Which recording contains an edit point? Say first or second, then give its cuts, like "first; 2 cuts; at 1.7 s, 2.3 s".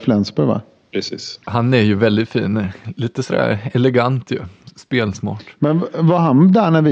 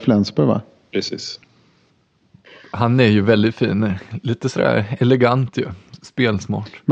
first; 1 cut; at 1.4 s